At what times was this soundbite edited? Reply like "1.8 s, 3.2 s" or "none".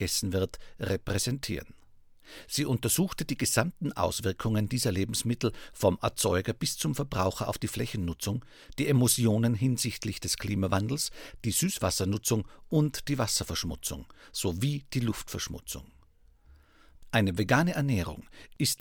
none